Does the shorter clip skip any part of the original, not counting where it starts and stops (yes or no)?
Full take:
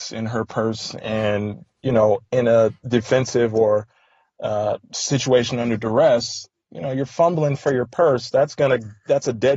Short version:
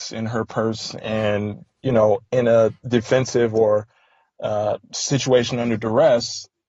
no